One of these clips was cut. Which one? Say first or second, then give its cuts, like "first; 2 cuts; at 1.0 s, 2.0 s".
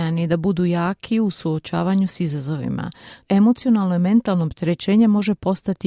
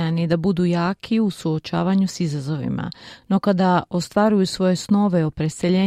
first; 1 cut; at 3.2 s